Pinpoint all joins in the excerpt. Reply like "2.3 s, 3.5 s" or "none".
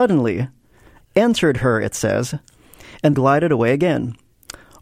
1.0 s, 3.1 s